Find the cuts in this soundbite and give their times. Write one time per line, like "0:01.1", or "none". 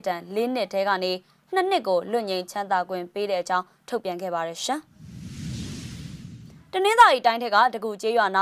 none